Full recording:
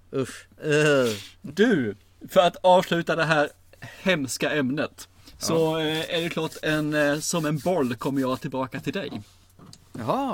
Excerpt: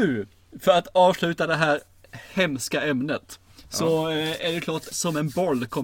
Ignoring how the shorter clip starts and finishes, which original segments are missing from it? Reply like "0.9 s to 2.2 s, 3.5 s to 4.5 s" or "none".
6.6 s to 7.2 s